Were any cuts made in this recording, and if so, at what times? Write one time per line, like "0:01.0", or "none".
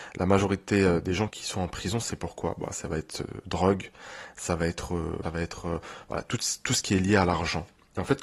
0:01.3
0:05.2